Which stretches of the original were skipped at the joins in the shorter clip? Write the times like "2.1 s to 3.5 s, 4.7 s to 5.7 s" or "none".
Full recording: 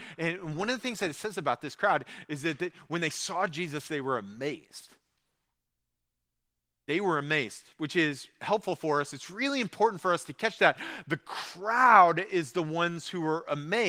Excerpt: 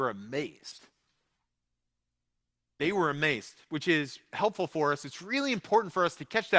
none